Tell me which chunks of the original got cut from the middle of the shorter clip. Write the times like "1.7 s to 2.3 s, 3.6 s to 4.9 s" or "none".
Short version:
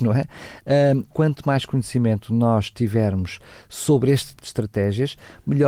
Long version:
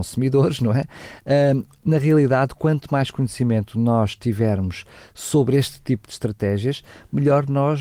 1.7 s to 2.6 s, 5.8 s to 6.0 s